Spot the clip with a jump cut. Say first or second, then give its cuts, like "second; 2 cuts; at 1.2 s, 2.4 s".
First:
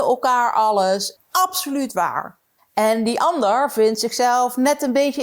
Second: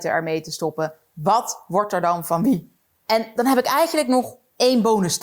first; 2 cuts; at 1.2 s, 2.6 s